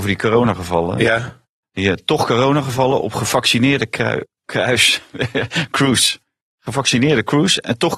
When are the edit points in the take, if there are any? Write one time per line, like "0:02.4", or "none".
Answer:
0:04.4